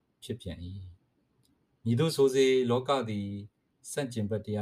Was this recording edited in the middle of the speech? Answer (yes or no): yes